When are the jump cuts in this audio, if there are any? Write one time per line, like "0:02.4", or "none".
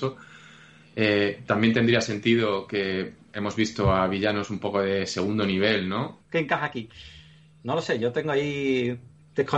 0:06.2